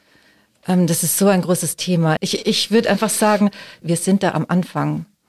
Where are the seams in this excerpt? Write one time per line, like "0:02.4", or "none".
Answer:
0:02.2
0:03.8